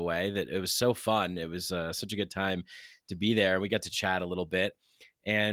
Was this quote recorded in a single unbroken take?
yes; 0 cuts

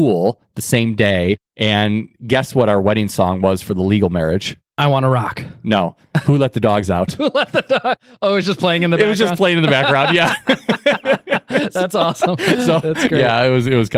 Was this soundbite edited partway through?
no; 0 cuts

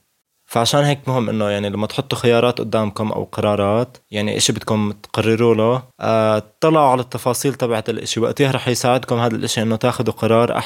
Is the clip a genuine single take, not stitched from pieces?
no; 2 cuts; at 4.0 s, 5.9 s

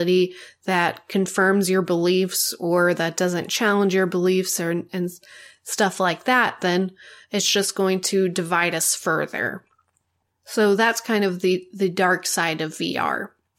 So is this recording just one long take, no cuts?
yes; 0 cuts

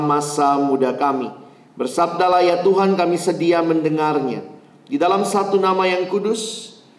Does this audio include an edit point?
no; 0 cuts

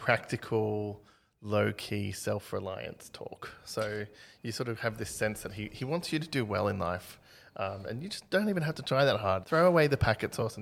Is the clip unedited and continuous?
no; 1 cut; at 9.4 s

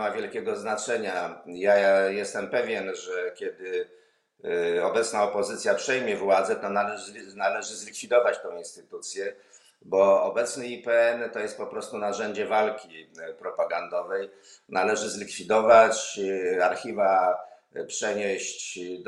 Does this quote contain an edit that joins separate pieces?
no; 0 cuts

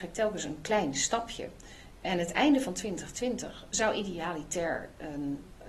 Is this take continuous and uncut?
yes; 0 cuts

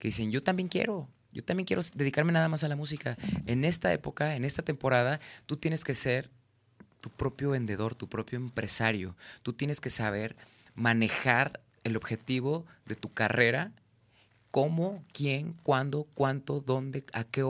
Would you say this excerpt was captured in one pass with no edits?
yes; 0 cuts

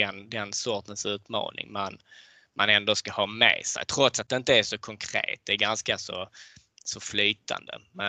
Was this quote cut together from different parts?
no; 0 cuts

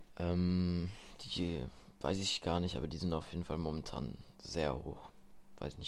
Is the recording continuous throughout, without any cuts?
yes; 0 cuts

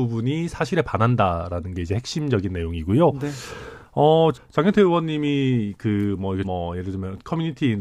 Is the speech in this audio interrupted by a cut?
yes; 2 cuts; at 4.3 s, 6.4 s

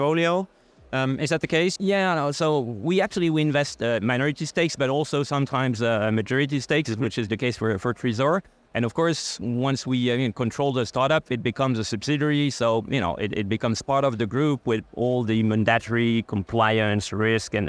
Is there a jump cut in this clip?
yes; 1 cut; at 1.8 s

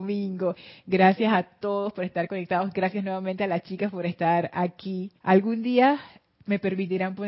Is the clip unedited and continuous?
no; 1 cut; at 5.2 s

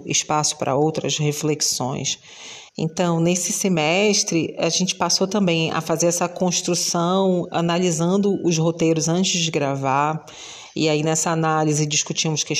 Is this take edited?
yes; 1 cut; at 2.7 s

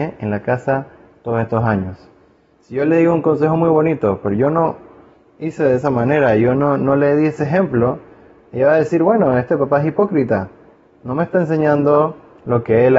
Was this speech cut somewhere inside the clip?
no; 0 cuts

